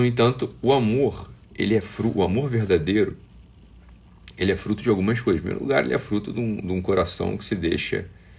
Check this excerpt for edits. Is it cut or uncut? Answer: uncut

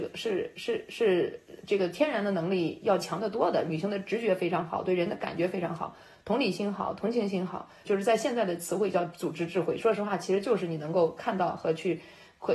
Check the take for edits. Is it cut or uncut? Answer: cut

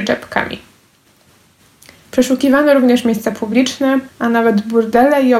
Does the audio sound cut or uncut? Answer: cut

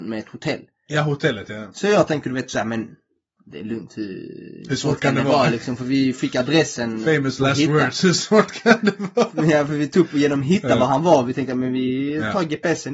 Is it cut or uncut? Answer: uncut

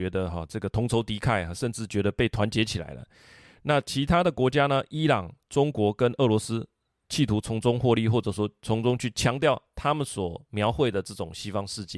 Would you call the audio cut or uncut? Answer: uncut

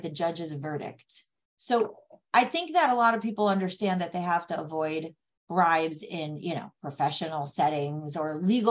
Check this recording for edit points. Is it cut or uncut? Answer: cut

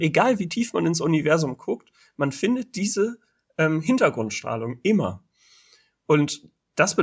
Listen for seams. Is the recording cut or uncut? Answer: uncut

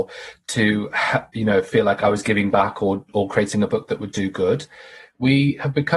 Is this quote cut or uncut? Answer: uncut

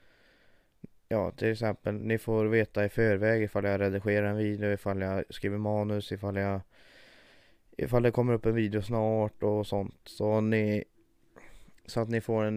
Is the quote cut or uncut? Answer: uncut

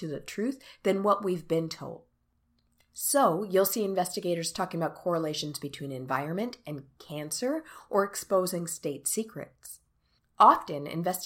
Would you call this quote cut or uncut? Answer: uncut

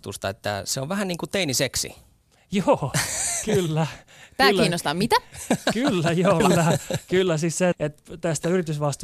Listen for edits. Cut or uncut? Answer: cut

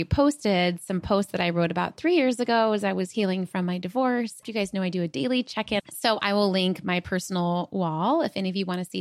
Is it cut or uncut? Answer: cut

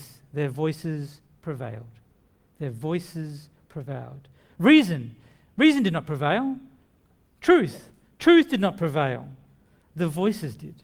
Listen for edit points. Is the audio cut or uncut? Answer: uncut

